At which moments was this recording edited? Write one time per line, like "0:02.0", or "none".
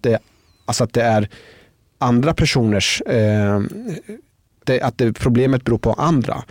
0:04.6